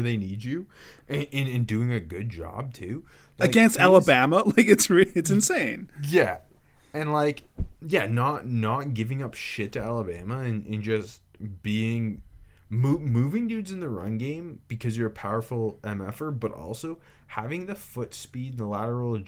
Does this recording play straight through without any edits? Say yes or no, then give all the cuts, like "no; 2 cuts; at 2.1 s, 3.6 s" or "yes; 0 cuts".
yes; 0 cuts